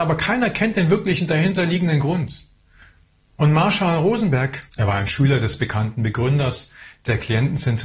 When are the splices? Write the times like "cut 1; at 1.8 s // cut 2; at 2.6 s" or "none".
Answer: cut 1; at 3.3 s // cut 2; at 4.7 s